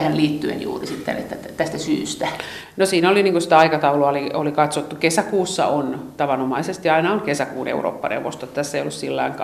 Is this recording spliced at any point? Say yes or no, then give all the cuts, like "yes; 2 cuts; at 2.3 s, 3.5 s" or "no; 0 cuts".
no; 0 cuts